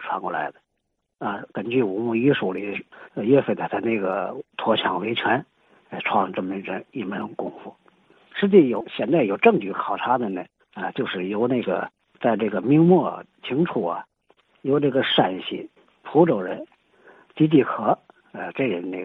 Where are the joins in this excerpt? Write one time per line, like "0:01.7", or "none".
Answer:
0:01.0